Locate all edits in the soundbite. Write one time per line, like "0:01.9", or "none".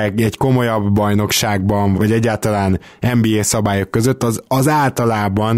0:01.9